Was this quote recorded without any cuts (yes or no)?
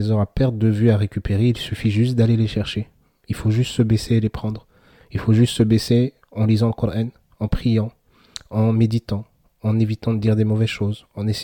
yes